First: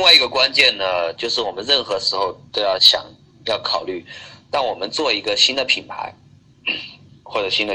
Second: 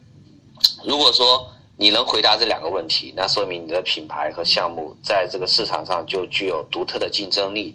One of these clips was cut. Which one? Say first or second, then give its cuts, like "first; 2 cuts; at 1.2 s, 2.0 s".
first; 2 cuts; at 1.2 s, 2.8 s